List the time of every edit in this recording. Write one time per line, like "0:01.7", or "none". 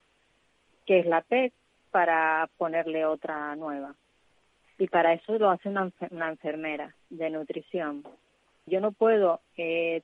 0:08.7